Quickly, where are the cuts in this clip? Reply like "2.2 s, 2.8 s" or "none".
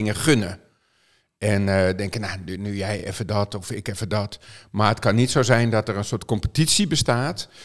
none